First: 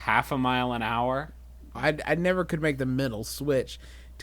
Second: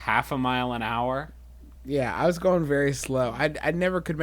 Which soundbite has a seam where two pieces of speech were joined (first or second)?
first